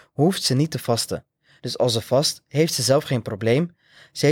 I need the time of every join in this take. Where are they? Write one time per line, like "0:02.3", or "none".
0:01.6